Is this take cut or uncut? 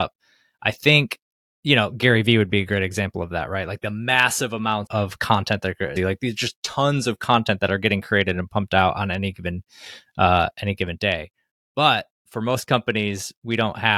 cut